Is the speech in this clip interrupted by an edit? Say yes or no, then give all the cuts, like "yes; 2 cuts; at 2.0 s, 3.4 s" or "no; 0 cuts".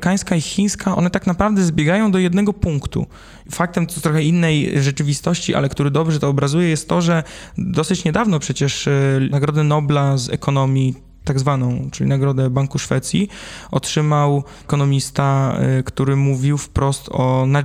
yes; 1 cut; at 0.9 s